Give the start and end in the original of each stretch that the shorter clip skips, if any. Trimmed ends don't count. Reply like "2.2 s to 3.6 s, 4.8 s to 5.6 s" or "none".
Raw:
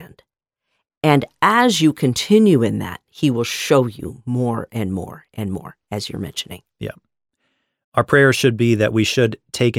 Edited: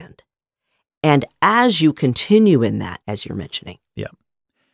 3.0 s to 5.8 s